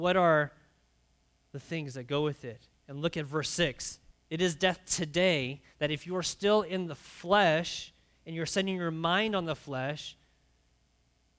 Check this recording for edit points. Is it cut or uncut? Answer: cut